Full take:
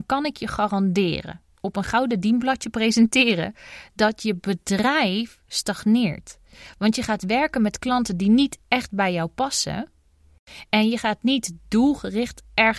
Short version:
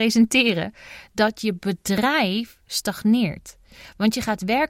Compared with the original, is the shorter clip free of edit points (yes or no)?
yes